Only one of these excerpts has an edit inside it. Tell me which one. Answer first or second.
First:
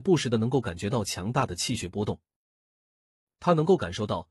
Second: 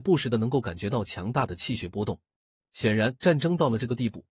second